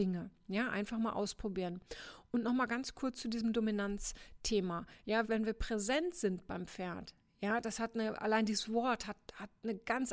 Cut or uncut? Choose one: cut